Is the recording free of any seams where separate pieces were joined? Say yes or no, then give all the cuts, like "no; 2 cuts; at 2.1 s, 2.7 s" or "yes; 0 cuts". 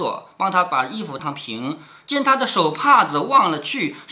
no; 1 cut; at 1.2 s